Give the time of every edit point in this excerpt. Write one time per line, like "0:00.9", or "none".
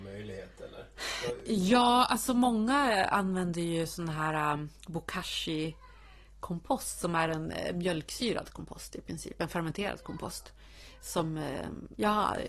none